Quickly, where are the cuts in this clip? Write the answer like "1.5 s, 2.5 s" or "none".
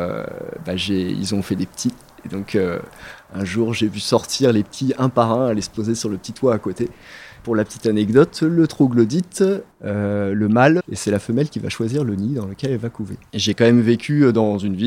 10.8 s, 13.3 s